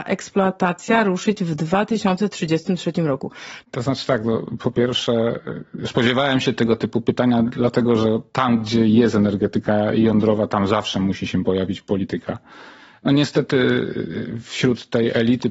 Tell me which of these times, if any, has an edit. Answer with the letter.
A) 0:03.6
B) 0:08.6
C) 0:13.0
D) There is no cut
A